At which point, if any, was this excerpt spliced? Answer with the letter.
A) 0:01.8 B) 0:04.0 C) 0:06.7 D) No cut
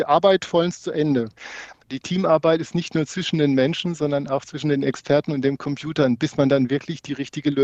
A